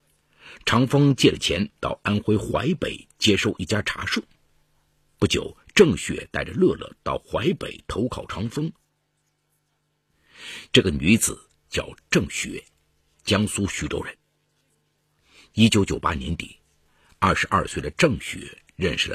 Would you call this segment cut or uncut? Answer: cut